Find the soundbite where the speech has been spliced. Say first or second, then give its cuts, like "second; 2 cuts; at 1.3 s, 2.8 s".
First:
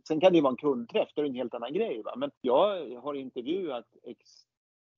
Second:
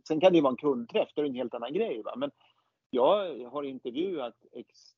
first; 1 cut; at 2.4 s